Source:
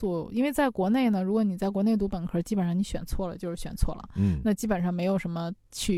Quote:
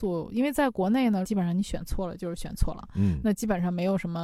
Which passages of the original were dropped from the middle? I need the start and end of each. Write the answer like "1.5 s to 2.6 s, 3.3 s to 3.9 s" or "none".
1.2 s to 2.4 s